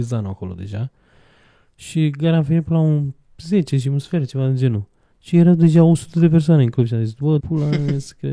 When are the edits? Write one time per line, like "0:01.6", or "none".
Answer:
0:07.4

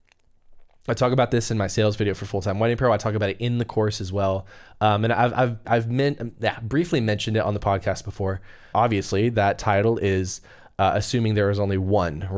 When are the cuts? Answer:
0:05.6
0:08.7

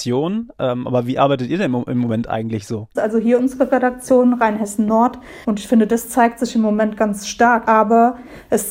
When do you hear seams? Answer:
0:03.0
0:05.4
0:07.7

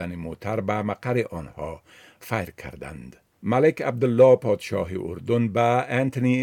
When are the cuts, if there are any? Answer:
0:03.3

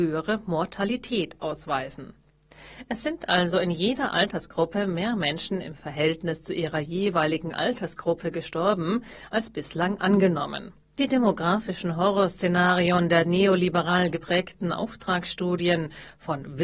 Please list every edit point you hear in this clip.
0:10.8

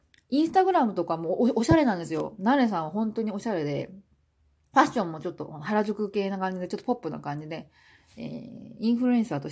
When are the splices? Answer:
none

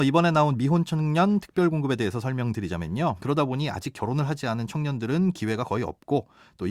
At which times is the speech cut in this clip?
0:03.2

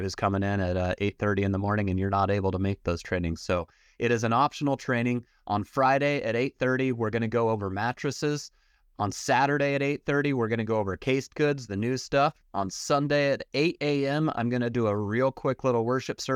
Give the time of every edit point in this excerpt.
none

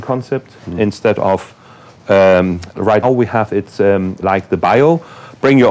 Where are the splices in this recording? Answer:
0:03.0
0:04.2

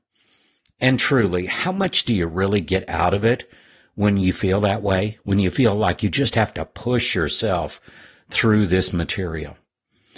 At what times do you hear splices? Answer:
none

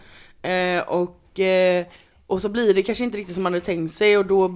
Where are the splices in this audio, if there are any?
none

